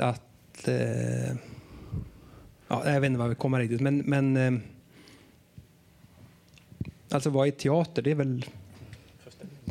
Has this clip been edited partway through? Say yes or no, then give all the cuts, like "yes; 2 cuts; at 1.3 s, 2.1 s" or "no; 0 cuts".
no; 0 cuts